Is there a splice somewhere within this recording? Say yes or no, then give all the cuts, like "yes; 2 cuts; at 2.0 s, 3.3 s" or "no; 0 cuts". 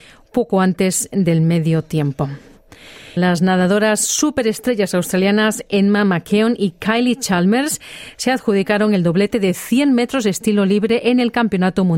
yes; 1 cut; at 3.2 s